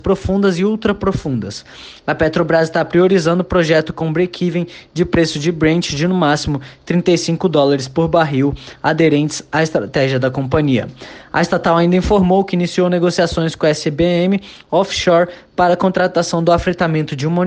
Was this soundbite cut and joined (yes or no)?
no